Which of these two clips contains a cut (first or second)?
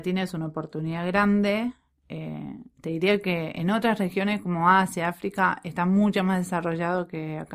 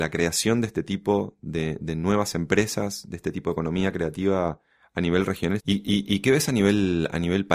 second